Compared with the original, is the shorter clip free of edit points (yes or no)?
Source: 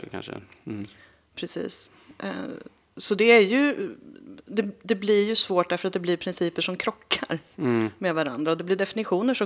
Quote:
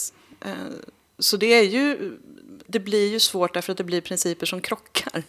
no